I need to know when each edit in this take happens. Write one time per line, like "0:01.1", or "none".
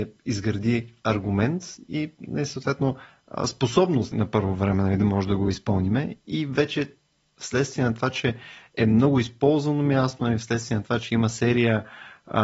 0:04.1